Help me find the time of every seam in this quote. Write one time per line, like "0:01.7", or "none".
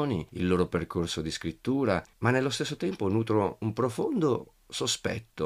0:02.1